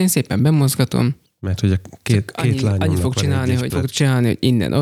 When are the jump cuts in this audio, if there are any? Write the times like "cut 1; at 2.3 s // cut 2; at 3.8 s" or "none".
cut 1; at 3.7 s